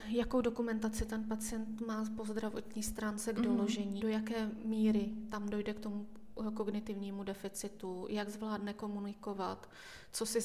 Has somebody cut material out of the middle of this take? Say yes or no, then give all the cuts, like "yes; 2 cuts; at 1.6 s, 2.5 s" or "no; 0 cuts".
yes; 1 cut; at 4.0 s